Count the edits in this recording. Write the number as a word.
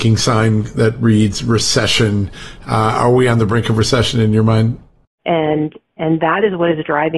one